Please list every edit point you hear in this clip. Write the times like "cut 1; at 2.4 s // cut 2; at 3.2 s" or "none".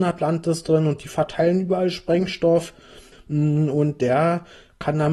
cut 1; at 3.1 s